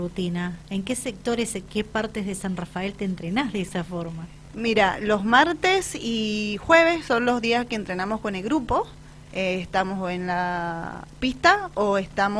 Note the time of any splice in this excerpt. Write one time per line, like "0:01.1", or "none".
none